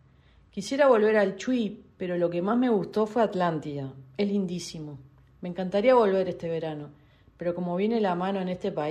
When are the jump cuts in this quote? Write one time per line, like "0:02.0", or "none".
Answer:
none

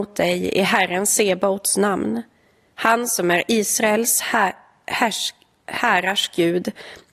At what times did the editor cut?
none

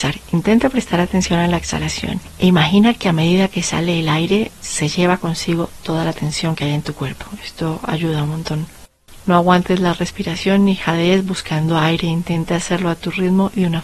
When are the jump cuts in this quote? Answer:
none

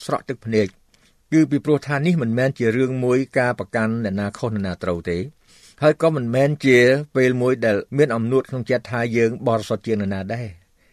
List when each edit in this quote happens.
0:07.9

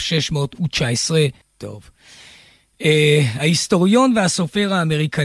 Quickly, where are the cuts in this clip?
0:01.4

